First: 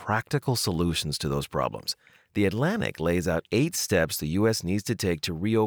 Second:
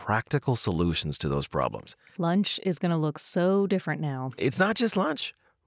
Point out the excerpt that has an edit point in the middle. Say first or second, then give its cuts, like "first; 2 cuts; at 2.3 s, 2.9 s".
second; 1 cut; at 2.2 s